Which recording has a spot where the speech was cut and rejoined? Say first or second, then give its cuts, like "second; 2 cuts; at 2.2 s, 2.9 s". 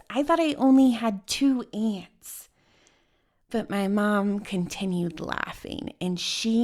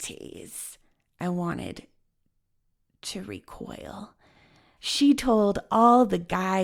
second; 1 cut; at 4.8 s